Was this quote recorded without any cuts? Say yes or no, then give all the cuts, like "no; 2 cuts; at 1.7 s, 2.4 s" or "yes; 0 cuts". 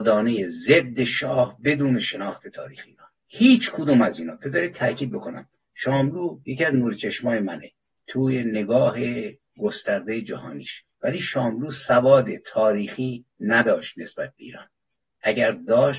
no; 2 cuts; at 3.2 s, 10.9 s